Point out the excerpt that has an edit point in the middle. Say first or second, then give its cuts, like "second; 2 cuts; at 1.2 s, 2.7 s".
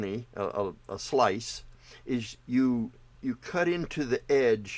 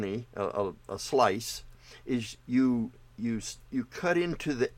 first; 1 cut; at 3.1 s